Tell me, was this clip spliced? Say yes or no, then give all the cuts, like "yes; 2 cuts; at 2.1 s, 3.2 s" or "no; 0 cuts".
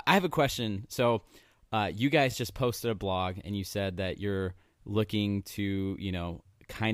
no; 0 cuts